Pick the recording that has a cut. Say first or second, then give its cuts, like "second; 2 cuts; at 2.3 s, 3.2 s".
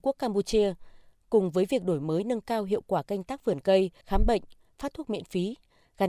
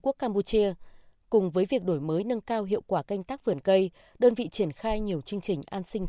first; 1 cut; at 4.0 s